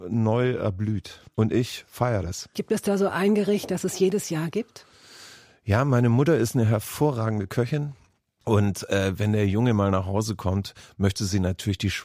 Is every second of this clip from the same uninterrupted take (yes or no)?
no